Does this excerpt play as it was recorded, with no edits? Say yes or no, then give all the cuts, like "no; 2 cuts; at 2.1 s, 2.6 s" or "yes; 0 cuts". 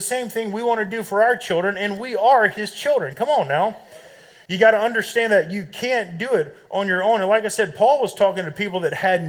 no; 1 cut; at 4.5 s